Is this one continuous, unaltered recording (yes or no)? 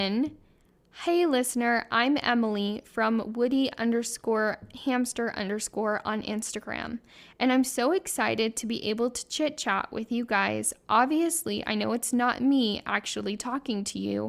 yes